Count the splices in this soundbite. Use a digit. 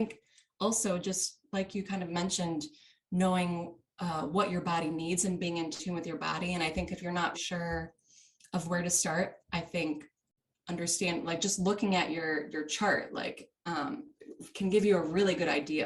1